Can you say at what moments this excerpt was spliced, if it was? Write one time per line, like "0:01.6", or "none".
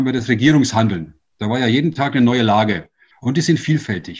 0:03.1